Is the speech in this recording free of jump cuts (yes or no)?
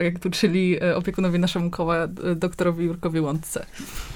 yes